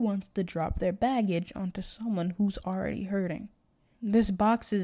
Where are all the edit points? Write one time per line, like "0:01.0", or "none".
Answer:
0:03.9